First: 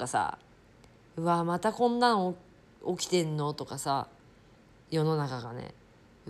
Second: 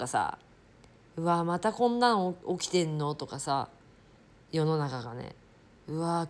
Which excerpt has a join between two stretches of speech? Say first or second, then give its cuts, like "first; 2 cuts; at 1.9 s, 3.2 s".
second; 1 cut; at 2.4 s